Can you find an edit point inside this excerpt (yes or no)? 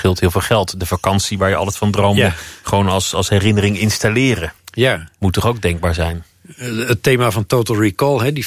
no